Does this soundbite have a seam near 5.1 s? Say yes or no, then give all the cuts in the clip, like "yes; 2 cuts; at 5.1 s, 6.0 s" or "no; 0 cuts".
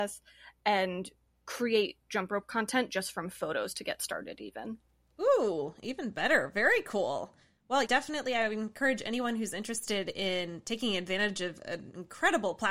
no; 1 cut; at 7.8 s